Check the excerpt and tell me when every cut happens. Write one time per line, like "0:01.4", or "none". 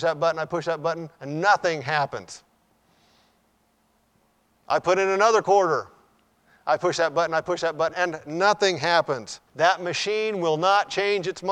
0:07.9
0:09.5